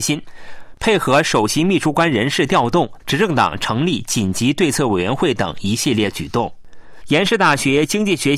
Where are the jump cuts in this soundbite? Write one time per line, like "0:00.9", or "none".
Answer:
0:03.0
0:07.0